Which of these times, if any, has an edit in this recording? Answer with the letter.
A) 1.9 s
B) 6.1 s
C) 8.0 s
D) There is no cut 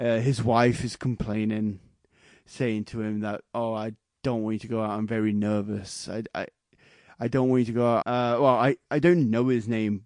C